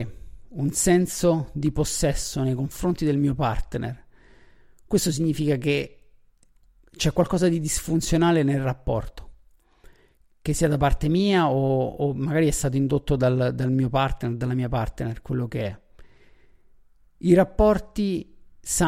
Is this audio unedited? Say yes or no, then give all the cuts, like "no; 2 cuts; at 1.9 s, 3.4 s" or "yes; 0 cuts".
yes; 0 cuts